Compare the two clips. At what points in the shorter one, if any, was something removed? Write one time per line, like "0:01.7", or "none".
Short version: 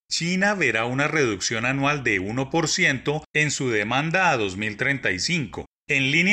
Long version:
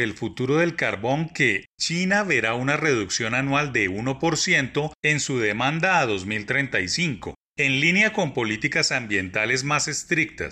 none